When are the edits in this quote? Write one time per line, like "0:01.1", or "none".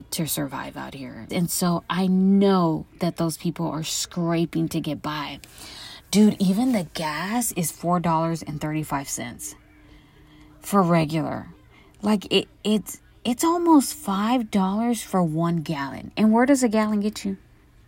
0:01.3